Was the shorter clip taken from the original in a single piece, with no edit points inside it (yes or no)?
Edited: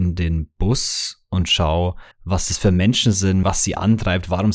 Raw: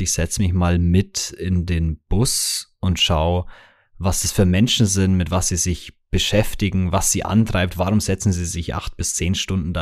no